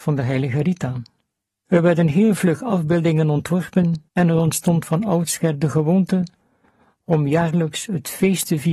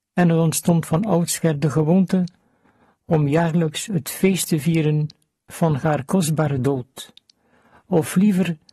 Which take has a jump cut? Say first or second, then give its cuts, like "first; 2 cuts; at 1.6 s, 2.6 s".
first; 2 cuts; at 1.7 s, 4.1 s